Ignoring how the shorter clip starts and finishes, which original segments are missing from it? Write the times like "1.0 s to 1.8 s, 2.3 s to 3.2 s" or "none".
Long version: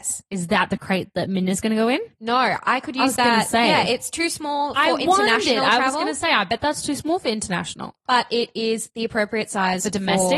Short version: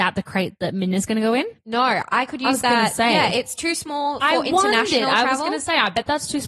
none